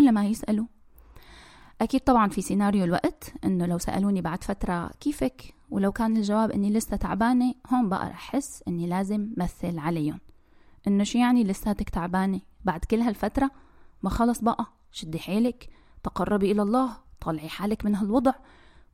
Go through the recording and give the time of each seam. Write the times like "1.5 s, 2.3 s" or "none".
none